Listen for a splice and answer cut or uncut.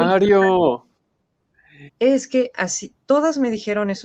cut